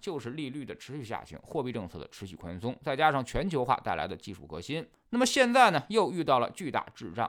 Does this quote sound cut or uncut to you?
uncut